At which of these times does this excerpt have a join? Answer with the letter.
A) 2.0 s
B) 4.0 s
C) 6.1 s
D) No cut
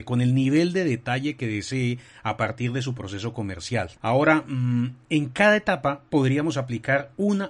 B